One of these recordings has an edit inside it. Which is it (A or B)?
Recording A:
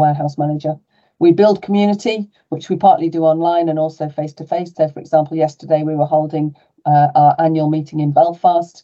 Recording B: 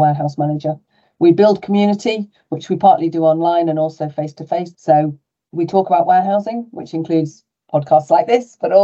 B